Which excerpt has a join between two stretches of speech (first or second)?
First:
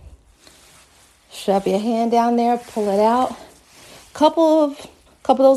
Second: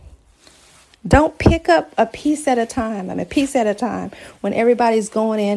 second